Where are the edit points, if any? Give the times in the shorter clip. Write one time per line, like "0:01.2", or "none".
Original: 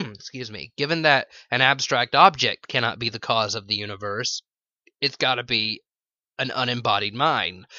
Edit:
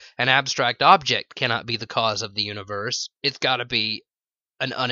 0:03.1